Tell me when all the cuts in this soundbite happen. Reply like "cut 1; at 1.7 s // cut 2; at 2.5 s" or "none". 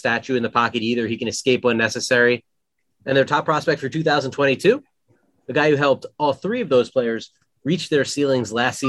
cut 1; at 2.9 s